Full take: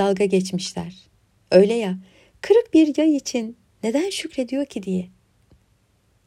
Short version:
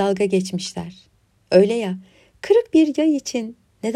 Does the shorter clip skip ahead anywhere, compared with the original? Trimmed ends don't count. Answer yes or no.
no